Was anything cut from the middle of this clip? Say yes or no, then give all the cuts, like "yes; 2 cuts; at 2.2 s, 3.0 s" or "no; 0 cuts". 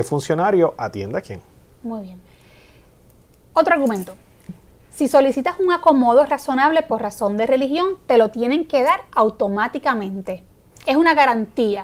no; 0 cuts